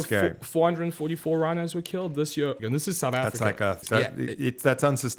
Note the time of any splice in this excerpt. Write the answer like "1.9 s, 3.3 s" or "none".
2.6 s, 3.8 s